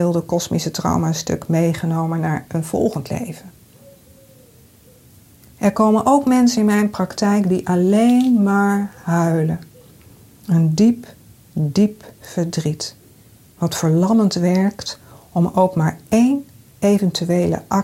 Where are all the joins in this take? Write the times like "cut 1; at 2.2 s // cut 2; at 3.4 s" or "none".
none